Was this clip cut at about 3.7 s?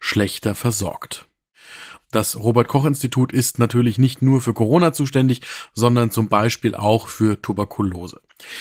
no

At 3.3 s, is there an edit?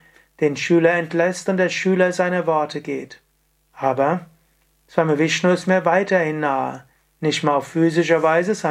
no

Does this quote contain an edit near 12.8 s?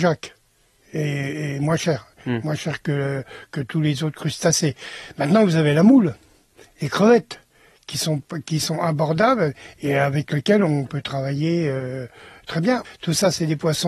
yes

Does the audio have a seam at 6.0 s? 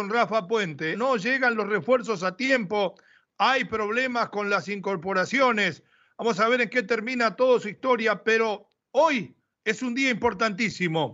no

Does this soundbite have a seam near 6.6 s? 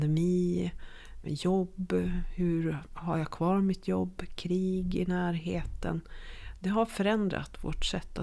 no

